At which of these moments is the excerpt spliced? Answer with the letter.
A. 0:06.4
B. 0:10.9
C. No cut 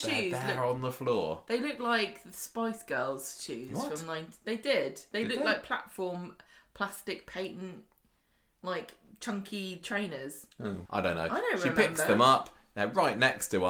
B